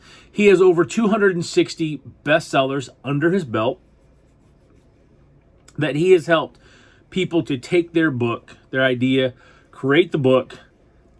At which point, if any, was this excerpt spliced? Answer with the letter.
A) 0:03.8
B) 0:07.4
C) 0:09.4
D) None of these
B